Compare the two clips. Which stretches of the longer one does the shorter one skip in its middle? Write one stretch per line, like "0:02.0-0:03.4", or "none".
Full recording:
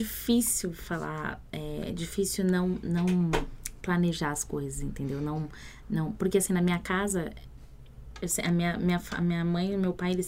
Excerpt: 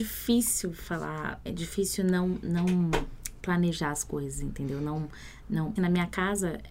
0:01.5-0:01.9
0:06.2-0:06.5